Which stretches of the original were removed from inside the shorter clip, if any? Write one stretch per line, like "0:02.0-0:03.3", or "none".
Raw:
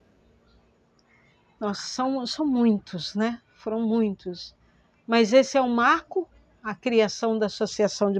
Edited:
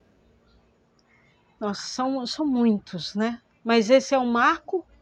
0:03.4-0:04.9